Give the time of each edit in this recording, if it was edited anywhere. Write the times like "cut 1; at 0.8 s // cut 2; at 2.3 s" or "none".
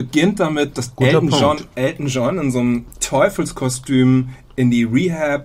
none